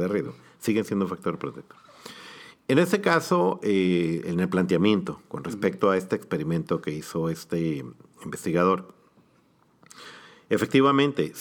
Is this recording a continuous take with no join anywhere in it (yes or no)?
yes